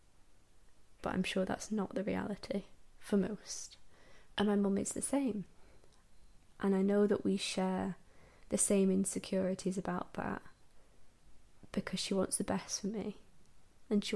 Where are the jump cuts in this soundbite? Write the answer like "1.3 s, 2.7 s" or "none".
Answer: 1.0 s, 4.3 s